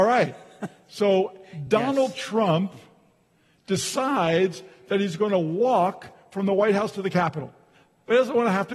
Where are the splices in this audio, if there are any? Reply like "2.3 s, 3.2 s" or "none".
none